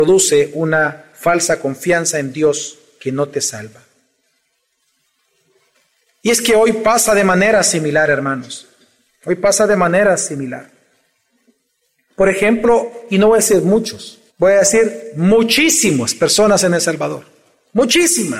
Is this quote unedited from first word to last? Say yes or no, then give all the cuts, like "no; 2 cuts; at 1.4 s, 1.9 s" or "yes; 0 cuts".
no; 2 cuts; at 12.1 s, 14.3 s